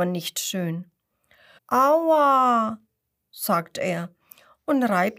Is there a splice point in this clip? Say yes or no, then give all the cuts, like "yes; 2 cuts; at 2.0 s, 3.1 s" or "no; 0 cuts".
yes; 1 cut; at 1.6 s